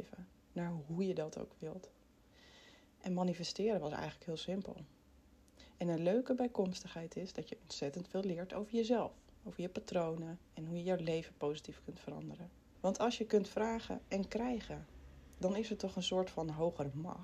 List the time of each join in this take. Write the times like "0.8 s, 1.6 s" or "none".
12.7 s